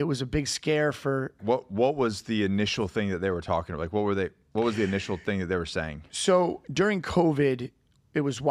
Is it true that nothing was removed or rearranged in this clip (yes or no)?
no